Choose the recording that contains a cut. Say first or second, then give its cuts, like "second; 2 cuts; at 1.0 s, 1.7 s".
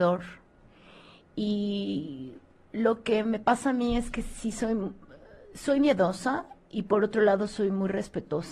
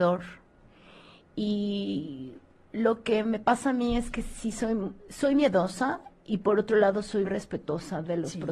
second; 2 cuts; at 5.0 s, 7.2 s